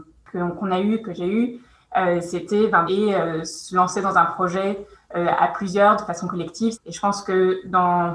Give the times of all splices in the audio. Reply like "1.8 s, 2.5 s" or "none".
2.9 s, 6.7 s